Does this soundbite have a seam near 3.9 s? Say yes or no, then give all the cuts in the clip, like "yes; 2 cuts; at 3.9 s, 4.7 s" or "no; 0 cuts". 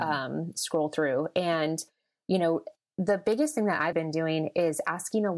yes; 1 cut; at 3.9 s